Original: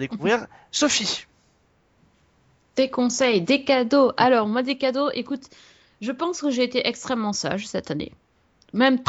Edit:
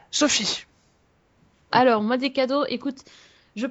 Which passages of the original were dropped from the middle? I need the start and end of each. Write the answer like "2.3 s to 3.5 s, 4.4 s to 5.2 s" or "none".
2.3 s to 4.2 s